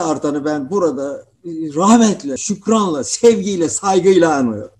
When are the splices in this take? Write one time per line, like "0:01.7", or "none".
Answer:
0:02.4